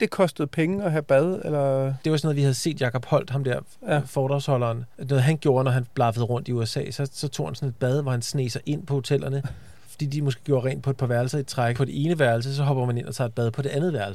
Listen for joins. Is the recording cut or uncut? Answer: cut